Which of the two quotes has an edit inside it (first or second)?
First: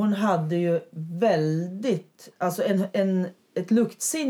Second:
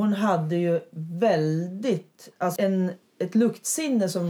second